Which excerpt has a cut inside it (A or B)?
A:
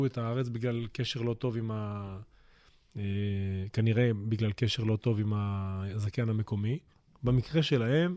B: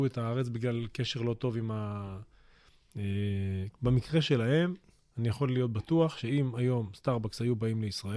B